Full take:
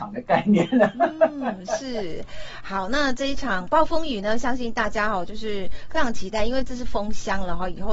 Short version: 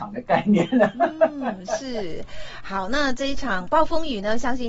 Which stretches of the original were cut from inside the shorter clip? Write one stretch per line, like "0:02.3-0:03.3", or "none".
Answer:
none